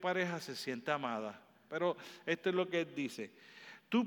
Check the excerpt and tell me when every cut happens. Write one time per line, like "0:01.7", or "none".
0:01.7